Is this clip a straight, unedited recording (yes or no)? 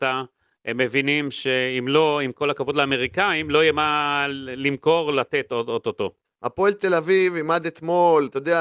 no